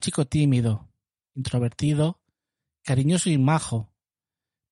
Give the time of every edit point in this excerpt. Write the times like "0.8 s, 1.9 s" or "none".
none